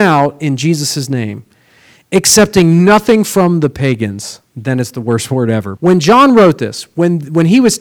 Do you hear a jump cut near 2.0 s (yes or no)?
no